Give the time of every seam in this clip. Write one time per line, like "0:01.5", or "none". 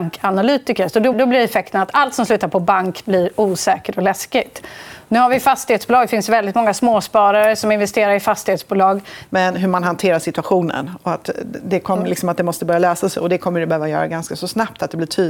0:01.1
0:09.3